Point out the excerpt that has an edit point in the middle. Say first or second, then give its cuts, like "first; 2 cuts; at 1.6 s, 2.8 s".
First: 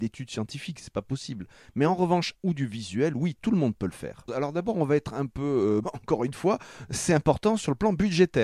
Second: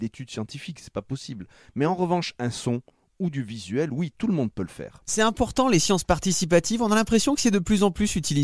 first; 3 cuts; at 2.3 s, 4.3 s, 5.8 s